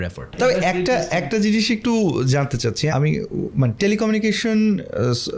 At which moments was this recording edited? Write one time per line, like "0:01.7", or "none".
0:02.9